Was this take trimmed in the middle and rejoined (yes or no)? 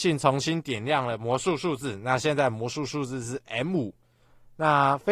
no